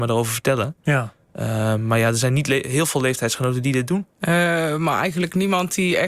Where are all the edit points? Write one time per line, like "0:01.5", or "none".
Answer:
0:04.2